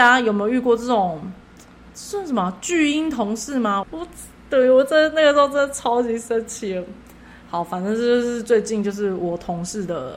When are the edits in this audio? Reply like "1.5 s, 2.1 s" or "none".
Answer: 3.8 s